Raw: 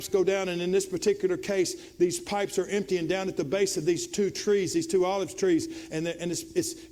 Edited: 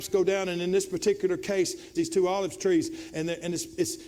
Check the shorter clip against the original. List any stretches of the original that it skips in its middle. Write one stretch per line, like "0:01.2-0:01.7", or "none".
0:01.9-0:04.7